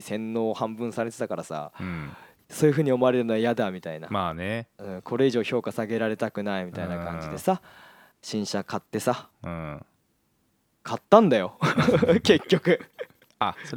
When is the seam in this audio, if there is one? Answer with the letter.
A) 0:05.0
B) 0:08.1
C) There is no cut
C